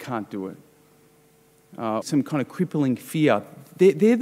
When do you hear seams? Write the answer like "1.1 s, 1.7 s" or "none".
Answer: 2.0 s